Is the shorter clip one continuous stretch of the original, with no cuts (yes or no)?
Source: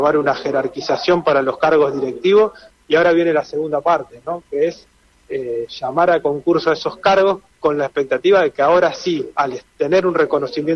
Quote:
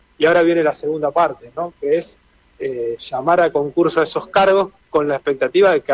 yes